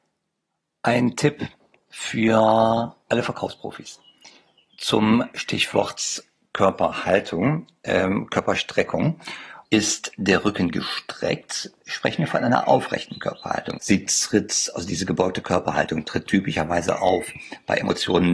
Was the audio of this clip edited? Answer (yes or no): yes